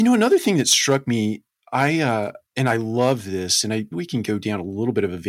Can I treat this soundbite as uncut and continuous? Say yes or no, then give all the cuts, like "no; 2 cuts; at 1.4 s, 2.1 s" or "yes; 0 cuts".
no; 2 cuts; at 2.5 s, 3.9 s